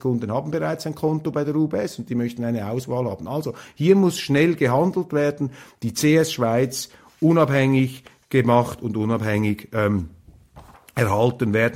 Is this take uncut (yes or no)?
yes